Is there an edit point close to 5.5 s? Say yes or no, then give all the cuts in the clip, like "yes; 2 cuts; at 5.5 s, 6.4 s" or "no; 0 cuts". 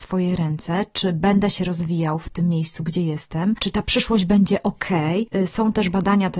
no; 0 cuts